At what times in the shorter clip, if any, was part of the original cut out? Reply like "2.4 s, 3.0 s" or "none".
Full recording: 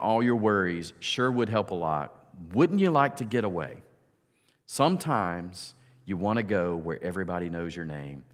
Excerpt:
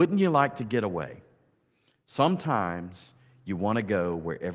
none